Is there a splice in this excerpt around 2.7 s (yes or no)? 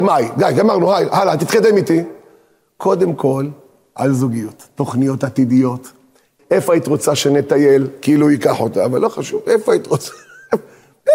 no